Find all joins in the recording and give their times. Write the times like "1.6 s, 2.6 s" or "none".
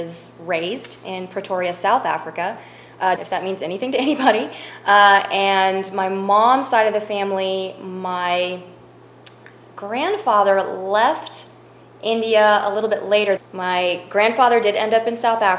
3.2 s, 13.4 s